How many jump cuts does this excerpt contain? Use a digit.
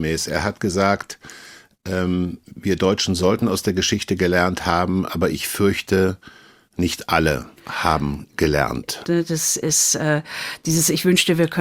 2